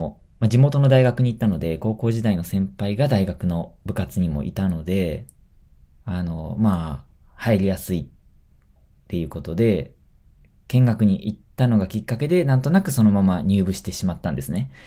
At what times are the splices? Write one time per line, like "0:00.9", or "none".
none